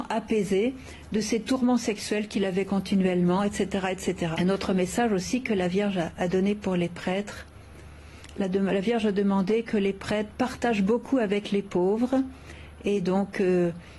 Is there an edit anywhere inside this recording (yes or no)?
yes